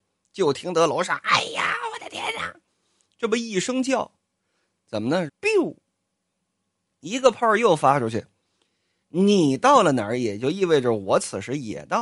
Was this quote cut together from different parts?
yes; 2 cuts; at 5.3 s, 9.0 s

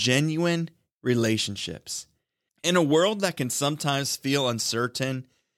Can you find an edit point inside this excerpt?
yes; 1 cut; at 2.5 s

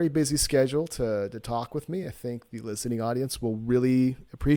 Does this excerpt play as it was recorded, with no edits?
yes; 0 cuts

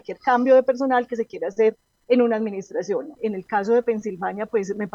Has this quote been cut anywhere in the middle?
yes; 1 cut; at 3.2 s

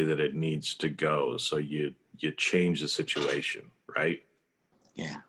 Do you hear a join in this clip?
no; 0 cuts

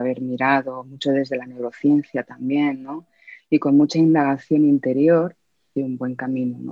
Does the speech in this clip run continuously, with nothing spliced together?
no; 1 cut; at 5.8 s

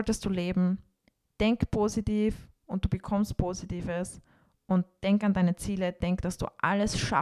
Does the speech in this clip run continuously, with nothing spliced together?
yes; 0 cuts

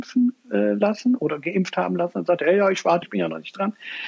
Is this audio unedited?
no; 2 cuts; at 1.2 s, 3.0 s

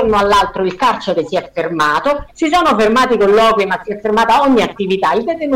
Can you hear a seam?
no; 0 cuts

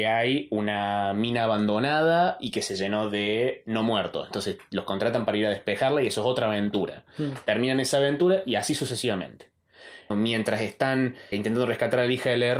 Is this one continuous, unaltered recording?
no; 2 cuts; at 10.1 s, 11.3 s

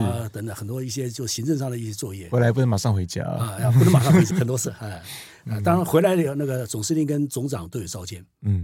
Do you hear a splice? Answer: yes; 1 cut; at 4.3 s

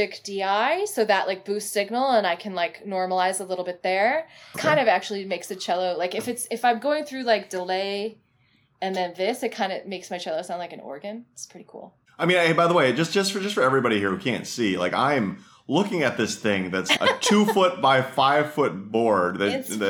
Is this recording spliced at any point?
yes; 2 cuts; at 4.5 s, 17.0 s

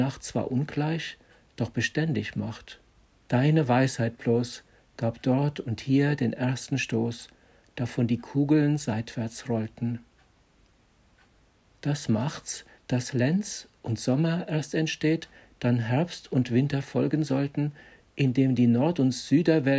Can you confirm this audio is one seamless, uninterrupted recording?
no; 2 cuts; at 3.3 s, 12.8 s

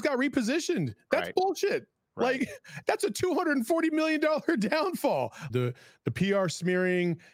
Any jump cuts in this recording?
yes; 2 cuts; at 2.8 s, 5.5 s

